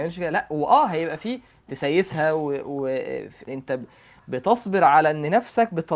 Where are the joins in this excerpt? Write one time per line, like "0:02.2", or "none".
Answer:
0:03.4